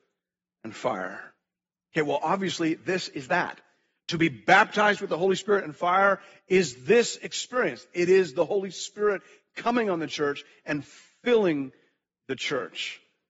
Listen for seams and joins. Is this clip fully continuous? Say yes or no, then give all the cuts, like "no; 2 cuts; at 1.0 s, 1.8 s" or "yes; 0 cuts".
yes; 0 cuts